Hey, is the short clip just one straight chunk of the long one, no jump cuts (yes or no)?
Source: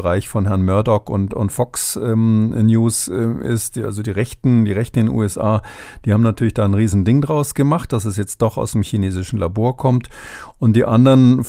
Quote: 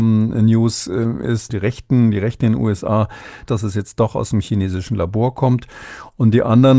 no